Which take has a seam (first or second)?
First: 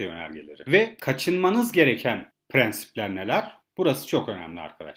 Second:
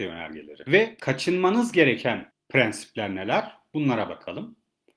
first